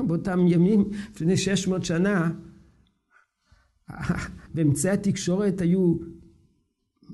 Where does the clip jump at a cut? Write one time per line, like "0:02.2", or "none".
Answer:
0:04.5